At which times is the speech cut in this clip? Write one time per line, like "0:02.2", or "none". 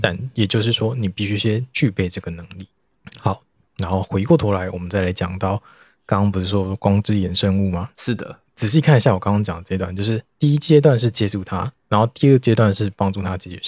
none